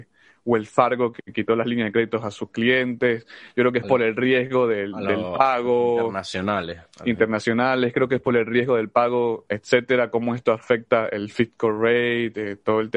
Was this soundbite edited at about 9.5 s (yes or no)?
yes